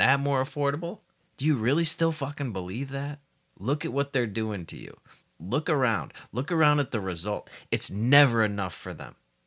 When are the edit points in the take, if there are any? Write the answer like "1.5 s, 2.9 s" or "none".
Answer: none